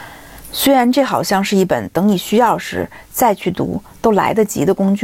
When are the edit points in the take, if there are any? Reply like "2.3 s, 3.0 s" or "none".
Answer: none